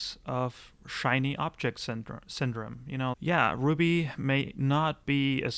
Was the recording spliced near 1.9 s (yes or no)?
no